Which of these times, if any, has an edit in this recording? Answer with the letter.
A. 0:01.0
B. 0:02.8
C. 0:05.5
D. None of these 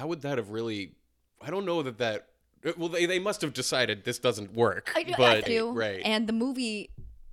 C